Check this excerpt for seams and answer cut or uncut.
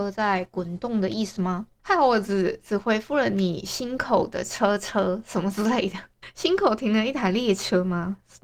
uncut